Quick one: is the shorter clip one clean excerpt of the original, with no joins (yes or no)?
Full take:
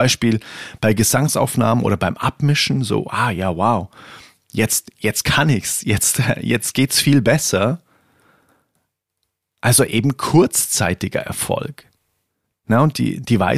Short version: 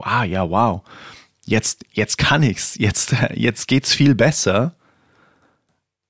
yes